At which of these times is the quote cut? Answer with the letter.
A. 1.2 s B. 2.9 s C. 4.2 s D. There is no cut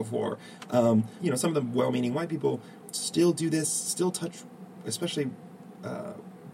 A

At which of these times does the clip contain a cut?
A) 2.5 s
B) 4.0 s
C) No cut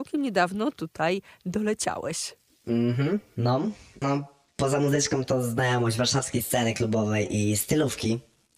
B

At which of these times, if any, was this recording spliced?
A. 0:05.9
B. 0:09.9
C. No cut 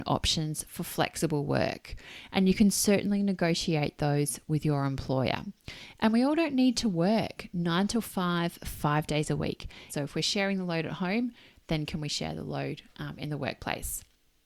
B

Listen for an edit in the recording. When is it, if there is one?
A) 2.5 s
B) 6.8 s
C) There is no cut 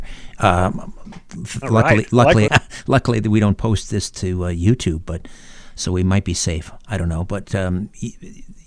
A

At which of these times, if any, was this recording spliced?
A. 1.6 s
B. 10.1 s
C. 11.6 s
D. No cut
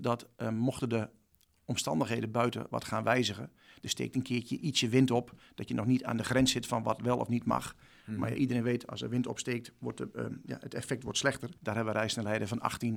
C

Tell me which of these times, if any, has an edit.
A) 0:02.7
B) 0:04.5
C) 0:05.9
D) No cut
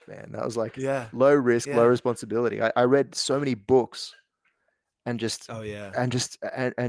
A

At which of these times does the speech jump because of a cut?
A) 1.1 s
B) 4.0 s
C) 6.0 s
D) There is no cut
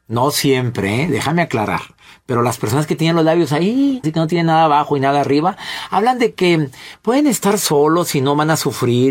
B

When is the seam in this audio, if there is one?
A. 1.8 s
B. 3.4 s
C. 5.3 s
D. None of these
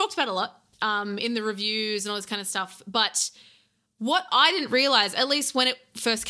D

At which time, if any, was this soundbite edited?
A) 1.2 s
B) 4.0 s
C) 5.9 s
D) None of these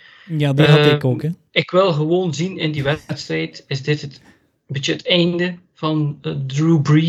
D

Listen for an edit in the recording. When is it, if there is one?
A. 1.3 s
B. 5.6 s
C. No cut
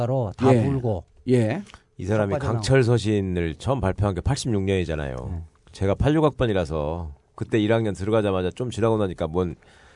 C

